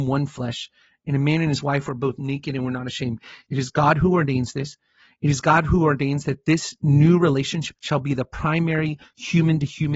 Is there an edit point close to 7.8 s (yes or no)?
yes